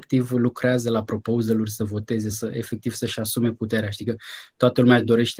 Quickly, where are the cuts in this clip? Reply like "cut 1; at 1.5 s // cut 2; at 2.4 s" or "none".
cut 1; at 2.3 s

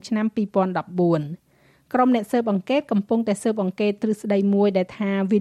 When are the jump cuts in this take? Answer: none

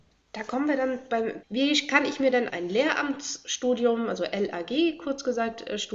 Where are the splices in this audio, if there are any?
cut 1; at 1.4 s // cut 2; at 2.5 s

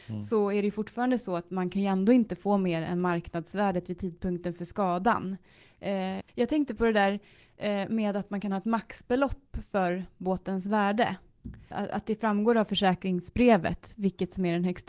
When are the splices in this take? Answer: cut 1; at 6.2 s

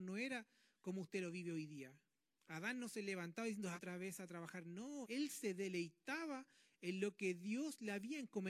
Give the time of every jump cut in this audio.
cut 1; at 3.7 s // cut 2; at 5.0 s

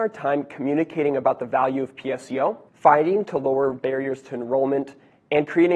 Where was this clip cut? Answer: cut 1; at 2.7 s

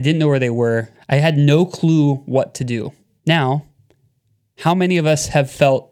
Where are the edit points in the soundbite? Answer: cut 1; at 0.9 s // cut 2; at 3.2 s

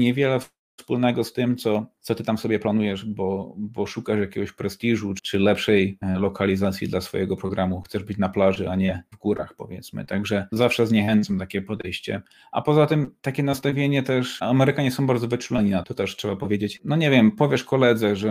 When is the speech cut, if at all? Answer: cut 1; at 15.8 s

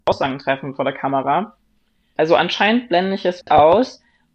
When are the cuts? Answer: cut 1; at 2.2 s // cut 2; at 3.4 s

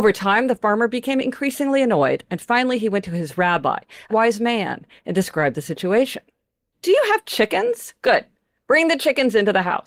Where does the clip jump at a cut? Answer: cut 1; at 4.1 s // cut 2; at 6.7 s

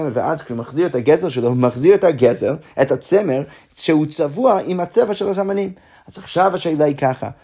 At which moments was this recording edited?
none

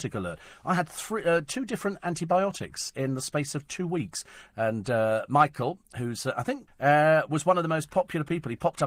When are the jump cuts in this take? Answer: cut 1; at 4.5 s // cut 2; at 6.7 s

